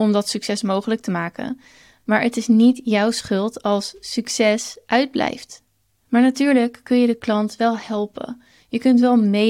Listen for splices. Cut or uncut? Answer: uncut